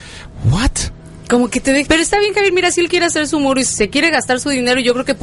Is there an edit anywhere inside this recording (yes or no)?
yes